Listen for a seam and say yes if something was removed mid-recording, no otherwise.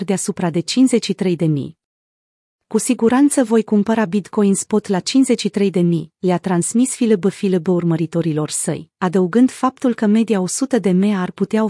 no